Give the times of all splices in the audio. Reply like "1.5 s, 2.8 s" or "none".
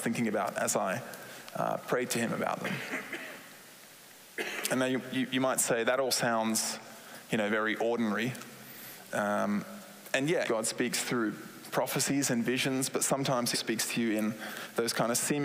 10.4 s, 13.5 s

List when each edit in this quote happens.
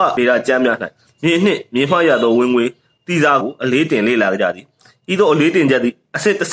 3.4 s

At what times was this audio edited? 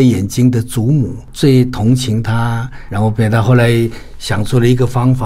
none

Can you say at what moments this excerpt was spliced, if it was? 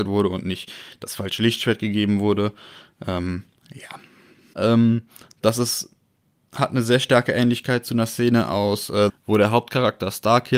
4.5 s, 9.1 s

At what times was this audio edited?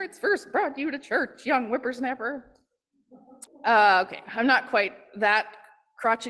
3.5 s

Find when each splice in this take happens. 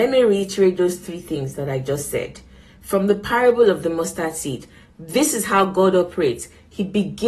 none

